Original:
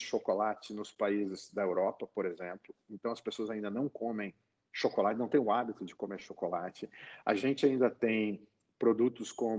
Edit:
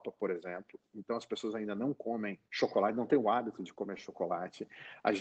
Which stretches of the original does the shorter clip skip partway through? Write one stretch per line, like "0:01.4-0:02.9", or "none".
0:04.4-0:04.7